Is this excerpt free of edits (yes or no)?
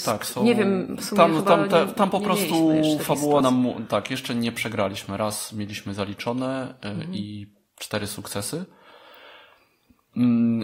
yes